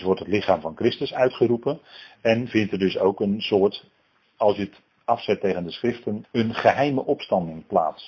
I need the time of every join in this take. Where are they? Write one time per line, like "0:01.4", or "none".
0:06.2